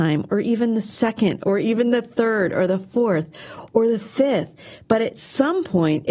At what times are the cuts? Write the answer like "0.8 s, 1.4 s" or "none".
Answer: none